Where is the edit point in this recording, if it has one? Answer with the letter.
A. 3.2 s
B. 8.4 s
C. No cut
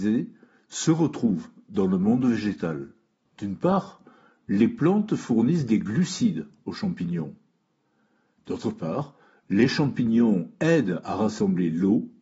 A